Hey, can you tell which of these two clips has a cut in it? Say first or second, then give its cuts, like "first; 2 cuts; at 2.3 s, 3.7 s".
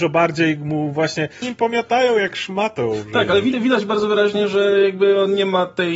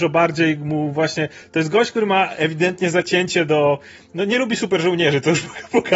first; 1 cut; at 1.4 s